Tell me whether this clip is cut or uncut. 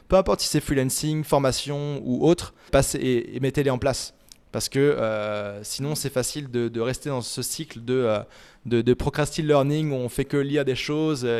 cut